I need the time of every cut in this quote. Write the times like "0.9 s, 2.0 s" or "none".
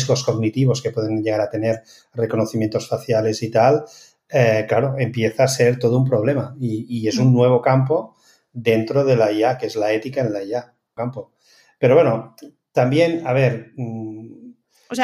11.0 s